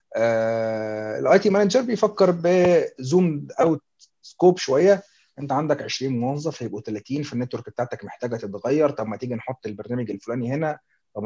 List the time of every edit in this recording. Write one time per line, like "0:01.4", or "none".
none